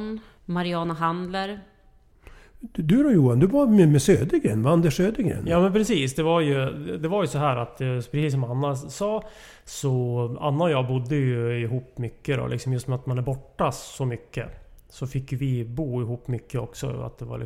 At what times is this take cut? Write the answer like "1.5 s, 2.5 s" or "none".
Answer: none